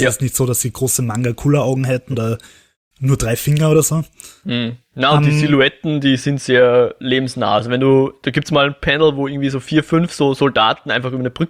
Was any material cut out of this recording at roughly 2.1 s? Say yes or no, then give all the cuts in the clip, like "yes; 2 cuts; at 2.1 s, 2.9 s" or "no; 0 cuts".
yes; 1 cut; at 2.1 s